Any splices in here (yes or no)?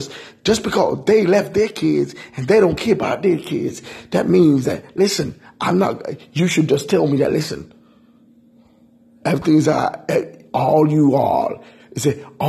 no